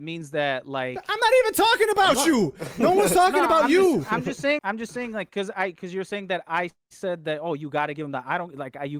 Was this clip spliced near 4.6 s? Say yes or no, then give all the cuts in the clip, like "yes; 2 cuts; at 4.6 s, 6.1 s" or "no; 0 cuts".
yes; 1 cut; at 4.6 s